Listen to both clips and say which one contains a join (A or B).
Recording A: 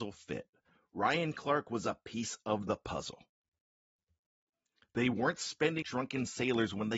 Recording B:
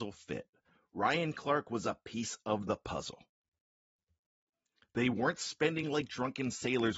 A